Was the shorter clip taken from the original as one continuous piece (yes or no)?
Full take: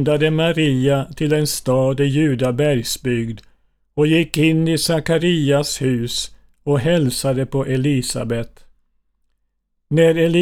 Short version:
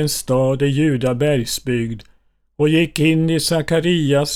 yes